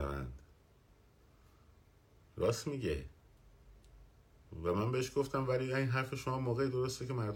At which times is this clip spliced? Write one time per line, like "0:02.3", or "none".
none